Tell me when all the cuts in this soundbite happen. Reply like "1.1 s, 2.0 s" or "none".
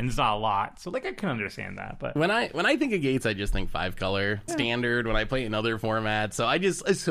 4.5 s